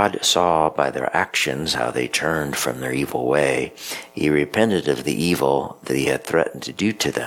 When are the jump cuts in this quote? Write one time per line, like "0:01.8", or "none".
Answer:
none